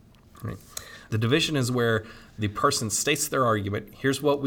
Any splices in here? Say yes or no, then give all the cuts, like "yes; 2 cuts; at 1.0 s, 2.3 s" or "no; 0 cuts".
yes; 1 cut; at 1.1 s